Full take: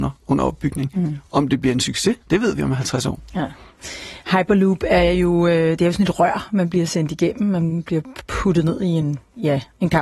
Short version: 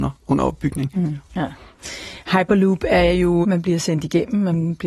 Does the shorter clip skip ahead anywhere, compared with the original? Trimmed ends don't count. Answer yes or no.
yes